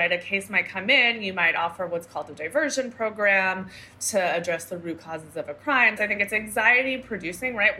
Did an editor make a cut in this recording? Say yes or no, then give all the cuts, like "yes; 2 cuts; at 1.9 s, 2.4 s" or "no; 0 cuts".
yes; 1 cut; at 6.0 s